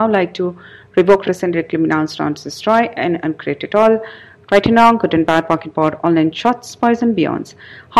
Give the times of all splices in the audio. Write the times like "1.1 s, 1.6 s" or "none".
1.2 s